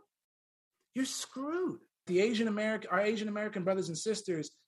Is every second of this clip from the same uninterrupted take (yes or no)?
no